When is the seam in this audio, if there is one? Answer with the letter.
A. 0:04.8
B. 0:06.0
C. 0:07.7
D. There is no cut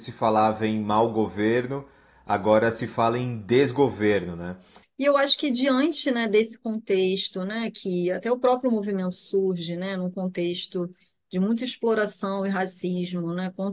A